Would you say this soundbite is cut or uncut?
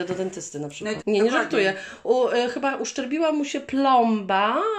cut